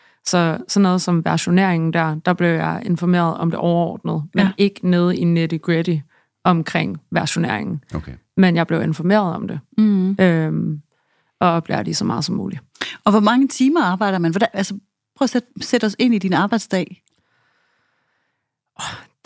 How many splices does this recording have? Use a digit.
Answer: 0